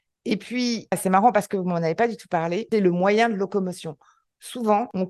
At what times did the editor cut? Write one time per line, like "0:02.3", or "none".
0:00.9
0:02.7

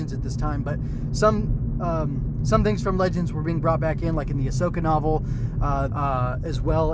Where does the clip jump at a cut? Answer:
0:05.9

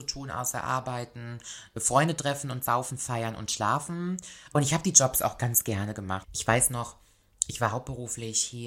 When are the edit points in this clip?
0:06.2

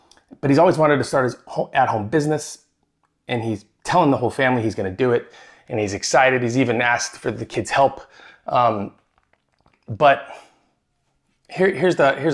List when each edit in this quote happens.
none

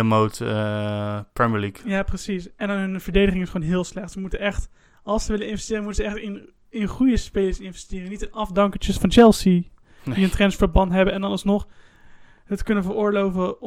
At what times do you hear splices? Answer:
none

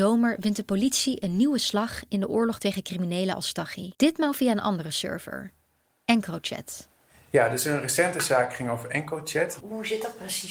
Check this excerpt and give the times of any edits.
0:03.9
0:09.6

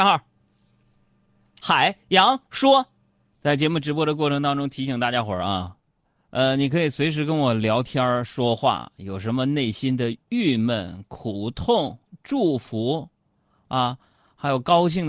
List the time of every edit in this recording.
0:03.3

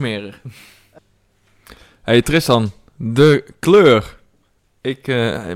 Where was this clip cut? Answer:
none

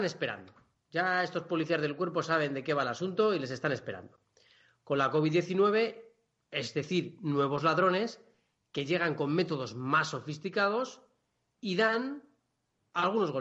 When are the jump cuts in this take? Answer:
none

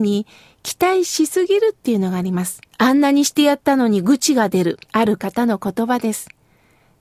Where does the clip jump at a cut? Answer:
0:02.7
0:04.9

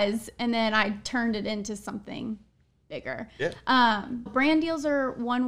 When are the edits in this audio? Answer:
0:04.3

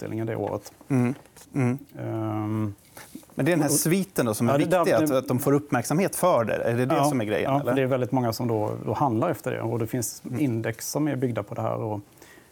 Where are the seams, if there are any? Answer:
0:01.4

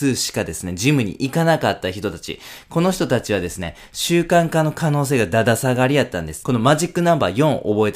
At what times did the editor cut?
0:06.4

